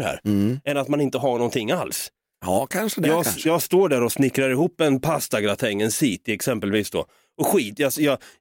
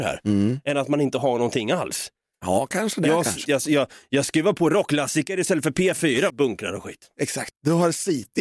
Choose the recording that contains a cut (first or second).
second